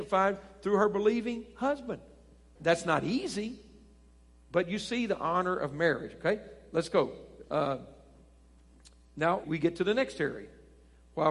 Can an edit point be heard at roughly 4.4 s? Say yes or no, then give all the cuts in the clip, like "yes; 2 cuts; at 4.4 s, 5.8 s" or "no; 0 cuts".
no; 3 cuts; at 2.6 s, 7.4 s, 9.4 s